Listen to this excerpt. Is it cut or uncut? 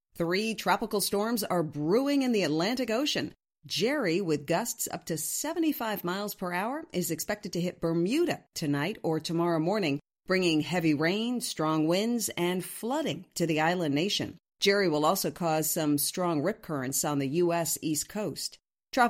uncut